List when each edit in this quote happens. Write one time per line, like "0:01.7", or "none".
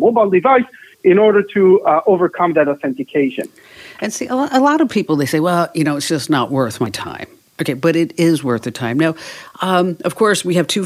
none